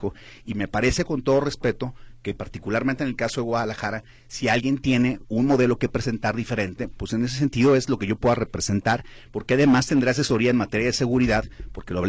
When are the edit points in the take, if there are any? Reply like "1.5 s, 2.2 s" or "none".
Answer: none